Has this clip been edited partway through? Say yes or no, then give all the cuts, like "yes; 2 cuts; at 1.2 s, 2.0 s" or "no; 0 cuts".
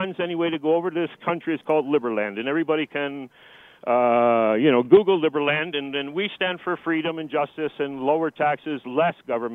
no; 0 cuts